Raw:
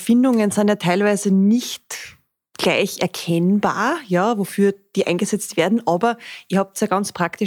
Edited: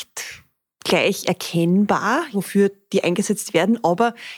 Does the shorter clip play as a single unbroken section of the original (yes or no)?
no